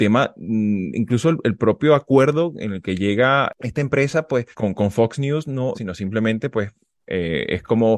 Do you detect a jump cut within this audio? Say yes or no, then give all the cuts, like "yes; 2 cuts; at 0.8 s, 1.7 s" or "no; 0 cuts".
yes; 2 cuts; at 4.5 s, 5.7 s